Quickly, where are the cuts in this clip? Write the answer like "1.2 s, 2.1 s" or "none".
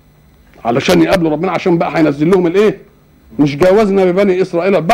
3.3 s